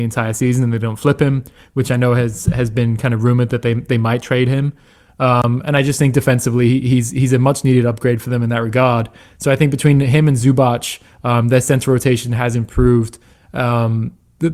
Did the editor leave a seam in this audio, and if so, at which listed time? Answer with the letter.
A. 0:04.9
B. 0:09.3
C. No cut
C